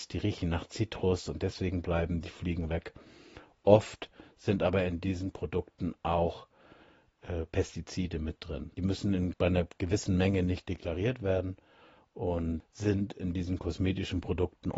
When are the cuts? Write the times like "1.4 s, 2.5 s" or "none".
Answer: none